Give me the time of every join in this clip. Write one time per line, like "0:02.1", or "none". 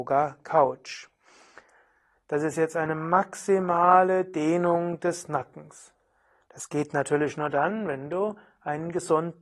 0:02.1

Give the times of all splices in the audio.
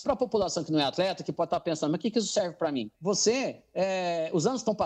0:02.9

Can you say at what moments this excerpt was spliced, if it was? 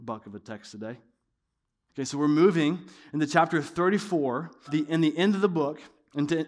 0:01.9
0:04.7

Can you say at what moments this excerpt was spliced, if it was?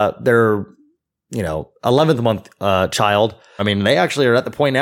0:03.6

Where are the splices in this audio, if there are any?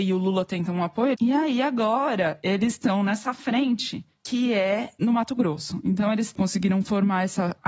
0:01.1

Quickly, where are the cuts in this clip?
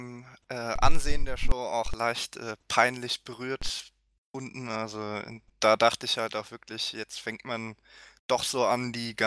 none

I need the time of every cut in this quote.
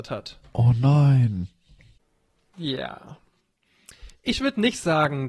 0:02.5
0:04.2

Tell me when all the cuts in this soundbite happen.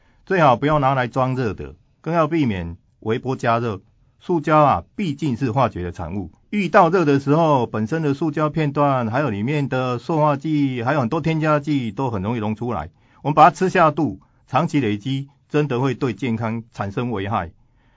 none

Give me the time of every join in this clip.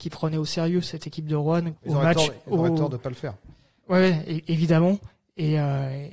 0:01.8

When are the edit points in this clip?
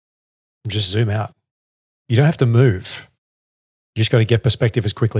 none

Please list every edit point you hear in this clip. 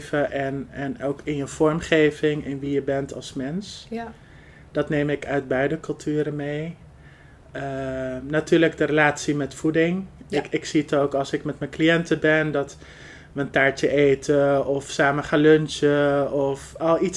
none

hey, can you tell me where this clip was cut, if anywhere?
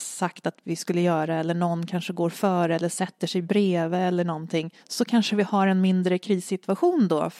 0:04.8

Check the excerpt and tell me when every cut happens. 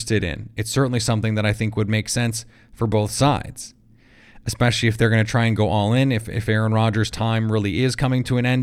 none

